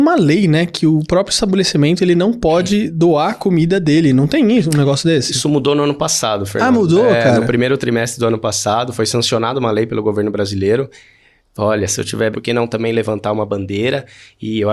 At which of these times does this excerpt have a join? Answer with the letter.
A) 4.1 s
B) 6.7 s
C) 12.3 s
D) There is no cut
C